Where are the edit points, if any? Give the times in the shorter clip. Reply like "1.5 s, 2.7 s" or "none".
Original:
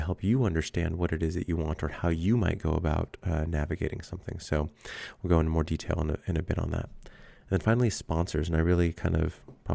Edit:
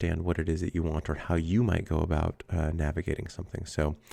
none